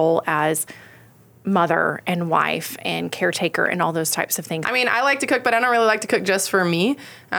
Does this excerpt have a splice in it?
yes; 1 cut; at 4.6 s

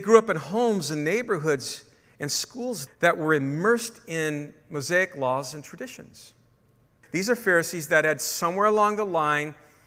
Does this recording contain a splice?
yes; 2 cuts; at 2.9 s, 7.0 s

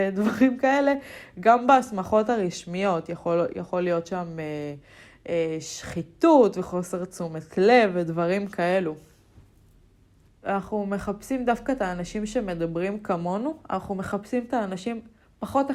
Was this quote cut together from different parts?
yes; 1 cut; at 10.3 s

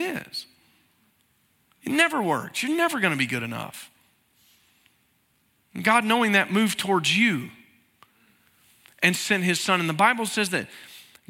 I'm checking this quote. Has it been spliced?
no; 0 cuts

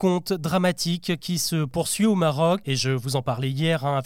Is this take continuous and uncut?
no; 1 cut; at 2.6 s

